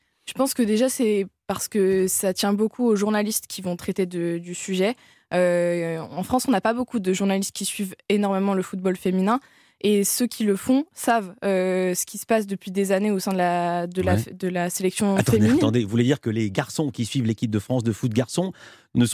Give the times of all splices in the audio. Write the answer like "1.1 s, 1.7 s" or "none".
none